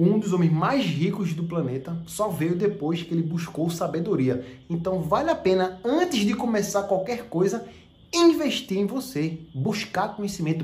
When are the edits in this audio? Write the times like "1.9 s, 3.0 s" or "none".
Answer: none